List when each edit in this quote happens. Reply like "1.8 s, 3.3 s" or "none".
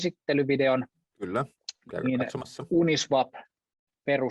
none